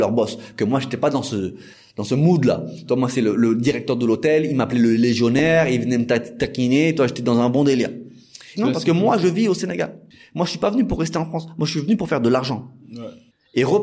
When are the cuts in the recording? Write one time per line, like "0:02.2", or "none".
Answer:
0:08.5